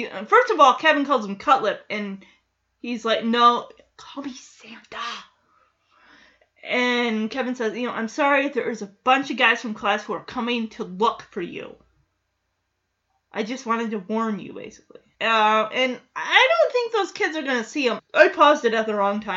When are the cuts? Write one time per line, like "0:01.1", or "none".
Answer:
0:15.1
0:18.0